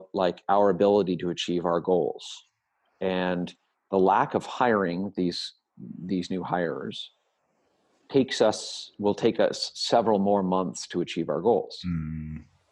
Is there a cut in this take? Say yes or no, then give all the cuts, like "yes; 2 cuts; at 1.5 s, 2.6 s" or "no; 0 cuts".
no; 0 cuts